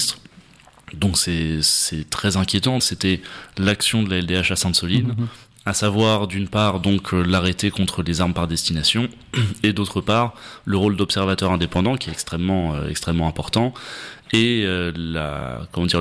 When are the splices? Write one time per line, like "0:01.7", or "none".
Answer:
0:02.8